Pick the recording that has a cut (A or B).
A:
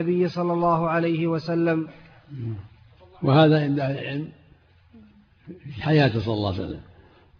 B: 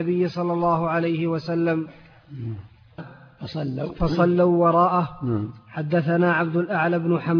B